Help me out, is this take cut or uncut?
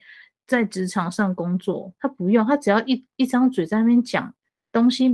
uncut